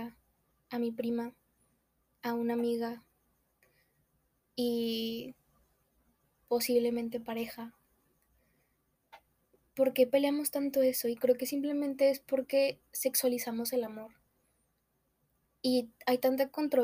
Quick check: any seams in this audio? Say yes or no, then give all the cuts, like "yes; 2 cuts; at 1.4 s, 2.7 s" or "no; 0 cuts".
no; 0 cuts